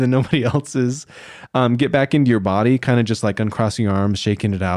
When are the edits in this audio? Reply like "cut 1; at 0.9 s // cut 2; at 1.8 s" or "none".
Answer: cut 1; at 1.5 s

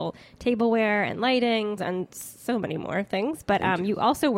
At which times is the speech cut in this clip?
cut 1; at 1.8 s

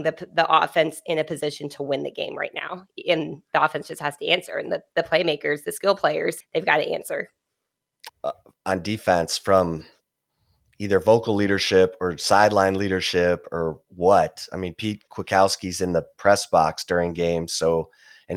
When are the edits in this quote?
cut 1; at 6.4 s // cut 2; at 8.1 s

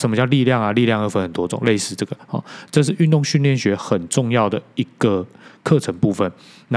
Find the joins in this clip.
none

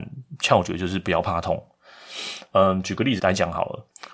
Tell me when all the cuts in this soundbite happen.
cut 1; at 3.2 s

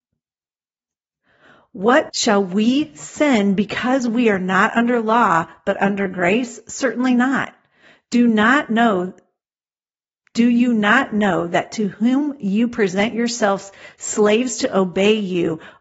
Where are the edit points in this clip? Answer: cut 1; at 2.1 s

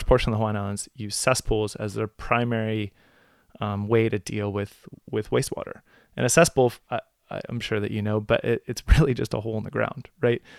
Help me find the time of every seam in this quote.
cut 1; at 6.9 s

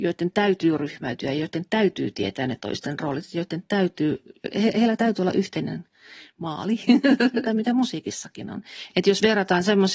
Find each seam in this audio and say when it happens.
cut 1; at 7.5 s // cut 2; at 8.9 s

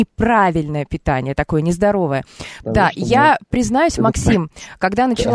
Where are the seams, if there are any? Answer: cut 1; at 2.6 s

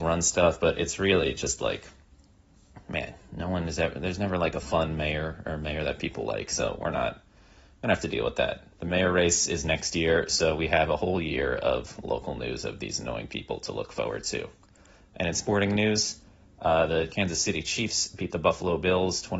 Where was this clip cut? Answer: none

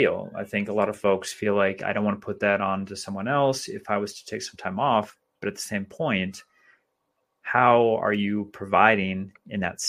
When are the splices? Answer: none

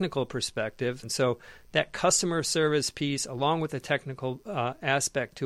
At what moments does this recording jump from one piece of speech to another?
cut 1; at 1.0 s

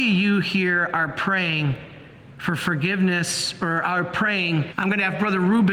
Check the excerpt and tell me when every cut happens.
cut 1; at 4.7 s

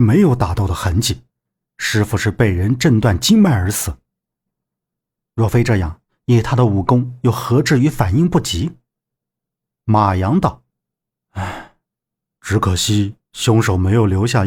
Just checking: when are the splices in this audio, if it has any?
cut 1; at 5.2 s

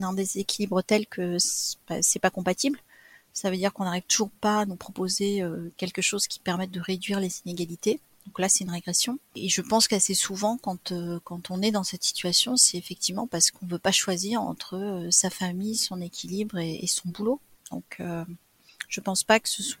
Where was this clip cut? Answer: none

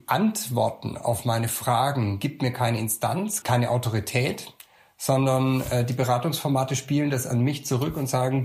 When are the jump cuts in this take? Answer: cut 1; at 3.4 s

